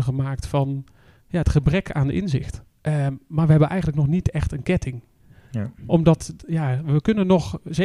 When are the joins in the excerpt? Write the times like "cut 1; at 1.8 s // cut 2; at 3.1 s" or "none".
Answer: cut 1; at 2.7 s